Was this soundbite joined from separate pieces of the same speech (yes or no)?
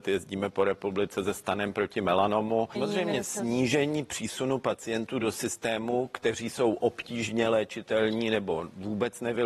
yes